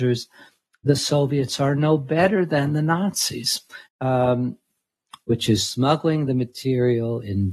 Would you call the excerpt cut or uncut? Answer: cut